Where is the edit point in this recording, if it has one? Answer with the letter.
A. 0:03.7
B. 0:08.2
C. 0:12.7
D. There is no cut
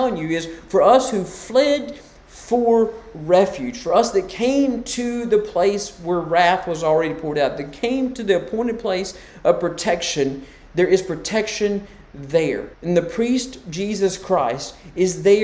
C